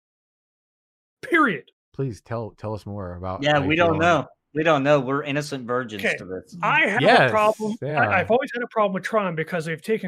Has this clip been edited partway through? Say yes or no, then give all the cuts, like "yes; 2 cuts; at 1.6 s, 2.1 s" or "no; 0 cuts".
no; 0 cuts